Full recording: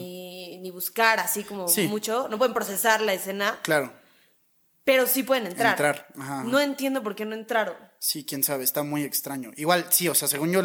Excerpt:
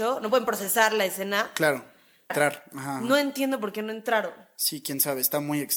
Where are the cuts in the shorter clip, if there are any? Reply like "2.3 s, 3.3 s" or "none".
2.3 s